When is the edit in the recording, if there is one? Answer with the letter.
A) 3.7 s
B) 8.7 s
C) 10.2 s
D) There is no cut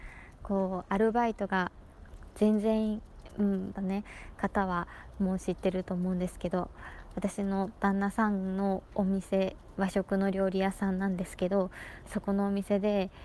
A